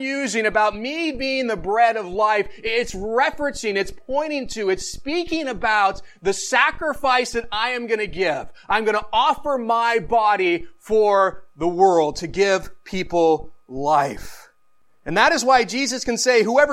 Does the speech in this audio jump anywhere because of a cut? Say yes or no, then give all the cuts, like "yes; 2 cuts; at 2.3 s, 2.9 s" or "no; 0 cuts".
no; 0 cuts